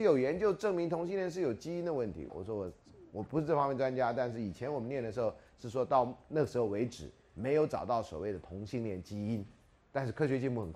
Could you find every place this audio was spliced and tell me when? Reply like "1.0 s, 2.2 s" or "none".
2.3 s